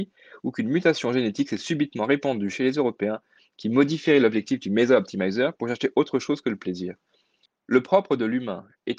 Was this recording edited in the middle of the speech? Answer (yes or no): yes